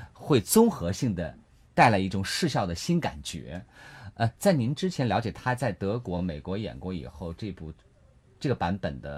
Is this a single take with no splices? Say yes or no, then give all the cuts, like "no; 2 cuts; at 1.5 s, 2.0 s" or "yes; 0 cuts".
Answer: yes; 0 cuts